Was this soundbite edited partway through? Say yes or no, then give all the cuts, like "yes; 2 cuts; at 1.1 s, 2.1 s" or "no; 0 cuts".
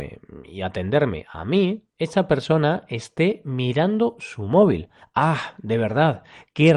no; 0 cuts